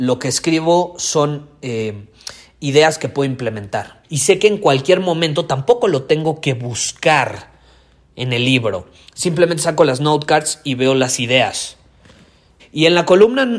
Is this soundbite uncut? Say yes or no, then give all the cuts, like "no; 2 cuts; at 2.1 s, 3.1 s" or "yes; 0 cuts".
no; 2 cuts; at 4.0 s, 12.6 s